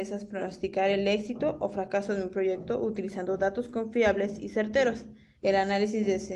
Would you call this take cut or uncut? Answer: cut